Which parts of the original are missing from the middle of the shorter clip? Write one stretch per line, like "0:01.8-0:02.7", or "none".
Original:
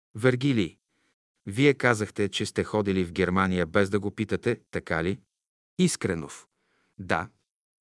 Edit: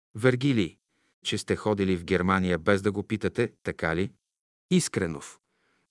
0:01.2-0:02.3